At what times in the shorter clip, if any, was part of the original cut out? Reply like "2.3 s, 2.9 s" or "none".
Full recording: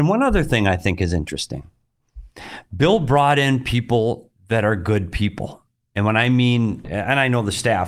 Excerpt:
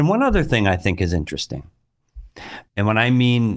2.7 s